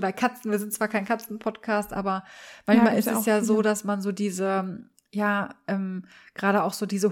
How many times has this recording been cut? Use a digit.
0